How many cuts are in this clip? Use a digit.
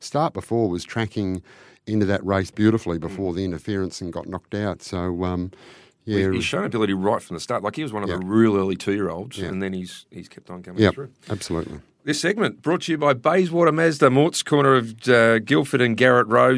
0